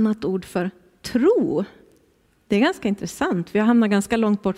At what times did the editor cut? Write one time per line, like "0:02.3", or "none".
none